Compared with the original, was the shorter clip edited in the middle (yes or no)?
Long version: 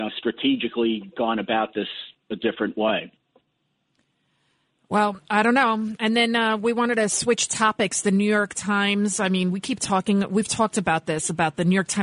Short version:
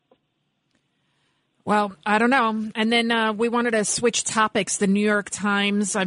no